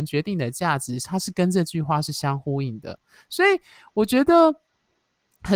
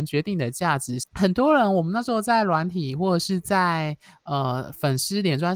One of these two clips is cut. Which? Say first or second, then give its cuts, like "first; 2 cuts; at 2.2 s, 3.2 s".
second; 1 cut; at 1.0 s